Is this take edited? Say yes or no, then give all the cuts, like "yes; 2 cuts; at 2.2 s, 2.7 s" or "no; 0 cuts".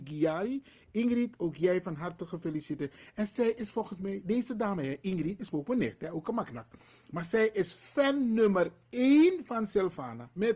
no; 0 cuts